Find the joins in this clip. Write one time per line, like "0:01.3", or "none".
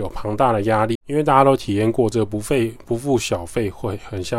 0:00.9